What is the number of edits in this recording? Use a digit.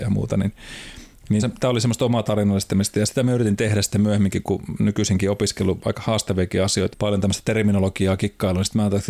2